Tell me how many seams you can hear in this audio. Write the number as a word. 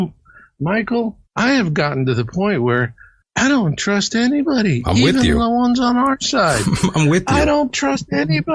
one